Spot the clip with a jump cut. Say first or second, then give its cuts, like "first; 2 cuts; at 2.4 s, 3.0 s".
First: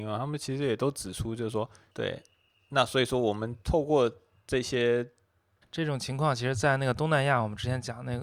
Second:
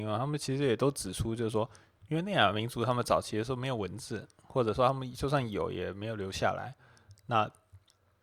first; 2 cuts; at 1.9 s, 5.6 s